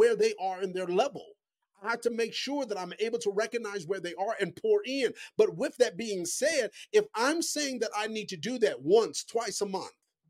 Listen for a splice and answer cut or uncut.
uncut